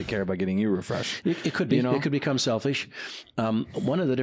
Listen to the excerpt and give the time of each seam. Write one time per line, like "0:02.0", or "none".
none